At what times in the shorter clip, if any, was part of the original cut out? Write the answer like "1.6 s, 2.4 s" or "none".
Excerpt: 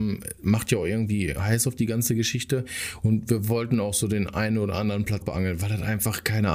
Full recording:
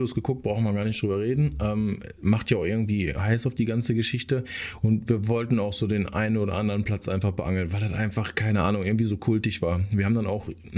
5.2 s